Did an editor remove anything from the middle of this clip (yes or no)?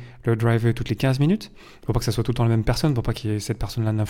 no